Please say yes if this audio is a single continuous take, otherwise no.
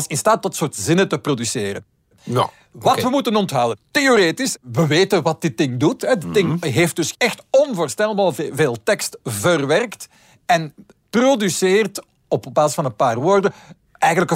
yes